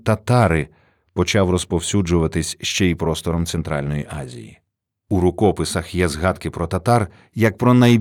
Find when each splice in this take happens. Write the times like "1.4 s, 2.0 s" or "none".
none